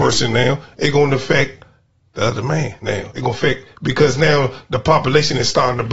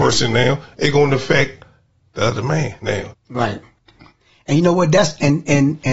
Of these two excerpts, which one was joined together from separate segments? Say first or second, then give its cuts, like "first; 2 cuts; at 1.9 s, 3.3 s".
second; 1 cut; at 3.1 s